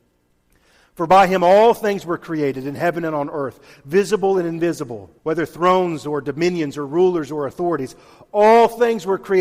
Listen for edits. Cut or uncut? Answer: cut